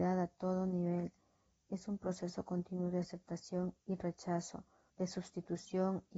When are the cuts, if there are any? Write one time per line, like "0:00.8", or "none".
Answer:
0:04.9